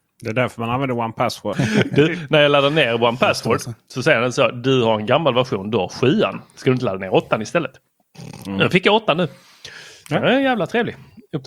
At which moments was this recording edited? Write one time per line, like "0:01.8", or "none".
0:01.5